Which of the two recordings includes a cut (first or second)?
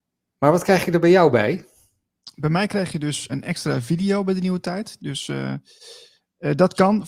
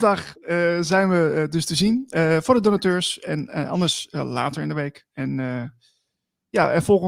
first